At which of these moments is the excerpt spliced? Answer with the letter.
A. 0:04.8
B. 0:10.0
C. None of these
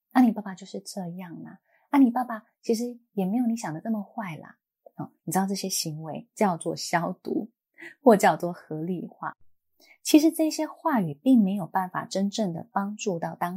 C